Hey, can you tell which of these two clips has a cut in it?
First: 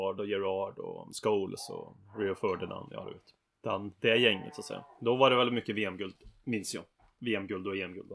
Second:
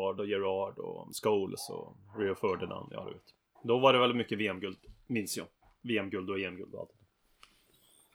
second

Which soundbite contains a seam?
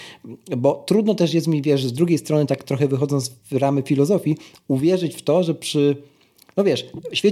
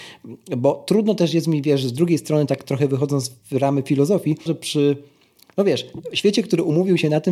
second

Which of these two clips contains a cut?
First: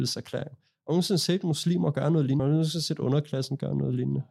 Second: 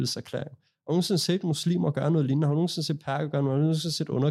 first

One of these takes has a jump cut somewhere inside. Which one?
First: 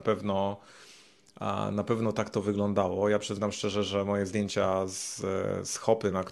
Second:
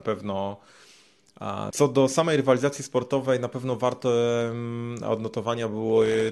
second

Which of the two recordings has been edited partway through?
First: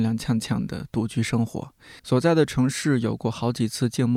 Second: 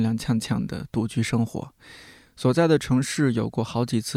first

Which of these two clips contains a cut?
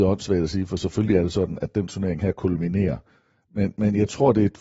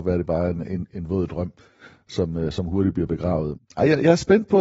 second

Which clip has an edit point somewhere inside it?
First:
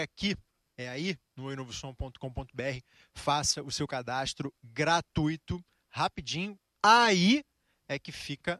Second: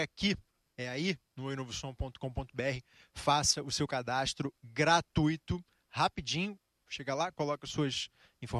first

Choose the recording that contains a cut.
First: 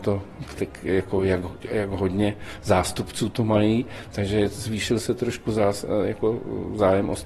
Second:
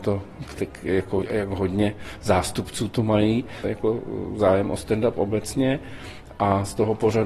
second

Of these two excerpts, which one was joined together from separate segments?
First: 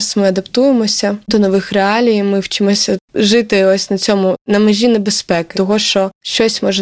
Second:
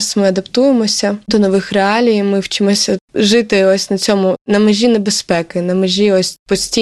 first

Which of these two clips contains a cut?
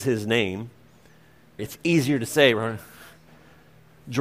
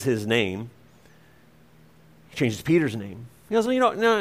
first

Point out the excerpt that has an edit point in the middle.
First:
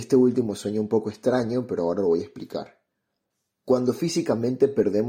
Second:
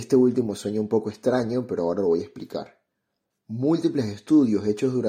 second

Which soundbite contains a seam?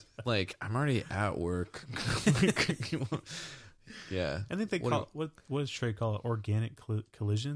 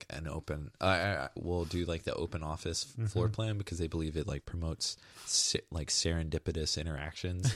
second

